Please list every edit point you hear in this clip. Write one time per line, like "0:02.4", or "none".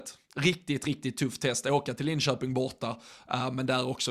none